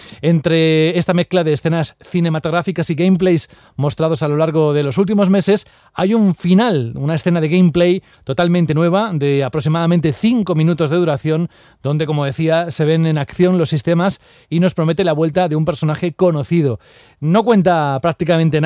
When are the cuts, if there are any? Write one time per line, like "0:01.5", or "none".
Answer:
none